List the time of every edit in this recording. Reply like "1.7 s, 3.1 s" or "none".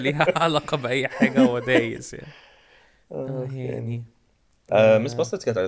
none